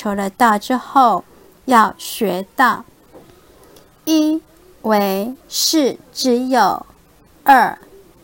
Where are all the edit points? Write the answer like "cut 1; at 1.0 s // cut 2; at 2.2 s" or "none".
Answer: cut 1; at 3.1 s // cut 2; at 5.4 s